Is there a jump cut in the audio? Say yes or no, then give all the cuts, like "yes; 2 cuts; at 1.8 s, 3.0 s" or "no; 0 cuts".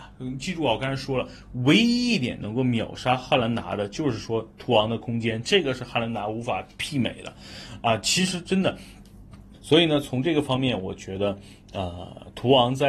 yes; 1 cut; at 9.5 s